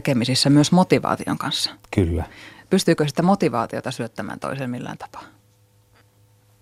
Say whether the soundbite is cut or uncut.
uncut